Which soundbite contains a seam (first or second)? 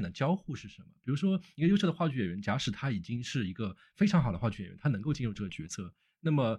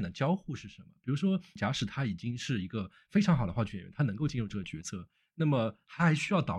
second